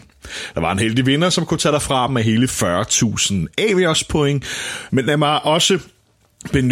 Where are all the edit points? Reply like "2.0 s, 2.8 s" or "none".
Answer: 4.9 s